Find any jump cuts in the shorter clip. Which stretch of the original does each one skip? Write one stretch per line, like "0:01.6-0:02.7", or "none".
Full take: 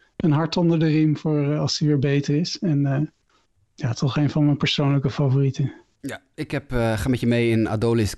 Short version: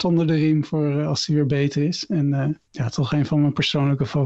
0:03.2-0:03.7

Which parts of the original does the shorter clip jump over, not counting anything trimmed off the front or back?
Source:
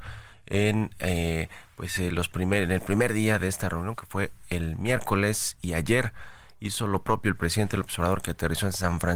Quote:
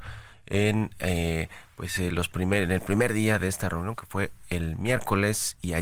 none

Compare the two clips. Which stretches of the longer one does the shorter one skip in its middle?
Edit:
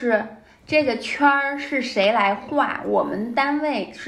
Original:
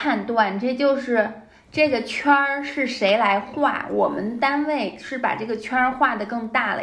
none

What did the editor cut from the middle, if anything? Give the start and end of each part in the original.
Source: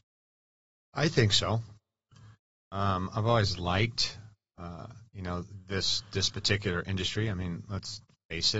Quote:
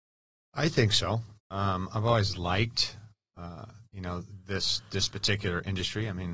0:01.8-0:02.6

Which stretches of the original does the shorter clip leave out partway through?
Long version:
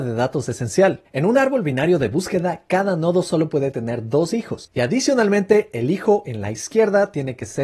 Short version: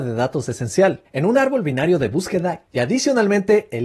0:02.7-0:04.7

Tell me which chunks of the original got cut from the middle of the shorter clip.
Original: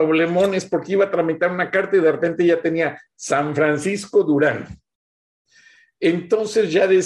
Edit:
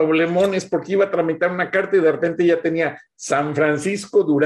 none

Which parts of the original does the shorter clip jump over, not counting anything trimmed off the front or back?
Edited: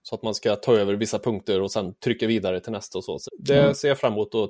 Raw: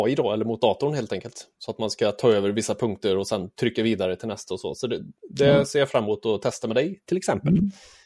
0:04.8-0:05.2

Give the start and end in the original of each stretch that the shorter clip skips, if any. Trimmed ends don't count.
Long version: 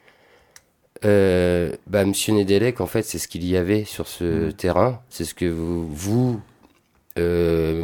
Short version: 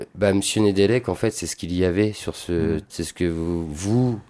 0:04.5-0:05.0

